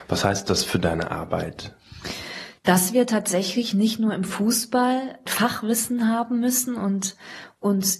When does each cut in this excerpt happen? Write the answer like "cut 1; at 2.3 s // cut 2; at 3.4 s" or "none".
none